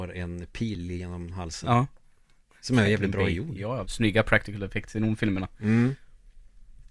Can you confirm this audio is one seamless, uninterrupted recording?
no; 1 cut; at 3.8 s

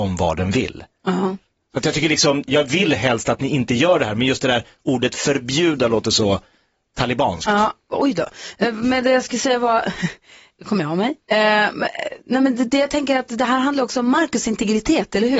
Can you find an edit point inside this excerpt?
yes; 1 cut; at 2.5 s

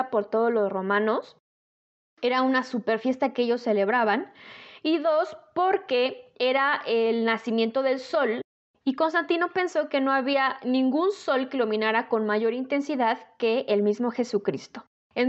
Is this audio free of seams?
yes; 0 cuts

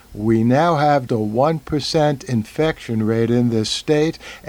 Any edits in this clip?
yes; 1 cut; at 1.1 s

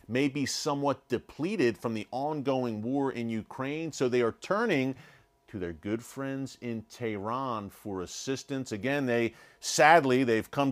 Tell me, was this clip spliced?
no; 0 cuts

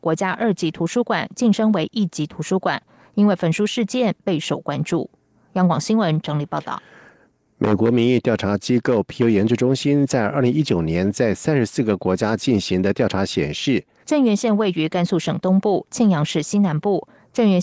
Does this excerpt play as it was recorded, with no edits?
no; 1 cut; at 14.0 s

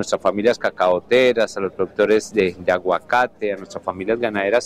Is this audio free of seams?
yes; 0 cuts

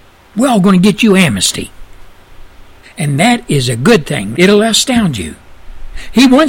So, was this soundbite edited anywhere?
yes; 2 cuts; at 2.8 s, 4.3 s

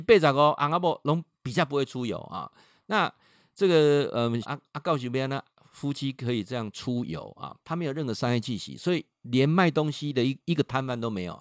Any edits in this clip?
yes; 2 cuts; at 4.4 s, 7.6 s

